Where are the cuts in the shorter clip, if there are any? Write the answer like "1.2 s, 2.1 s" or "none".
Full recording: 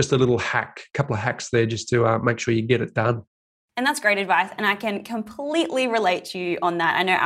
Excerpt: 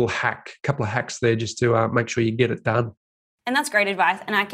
none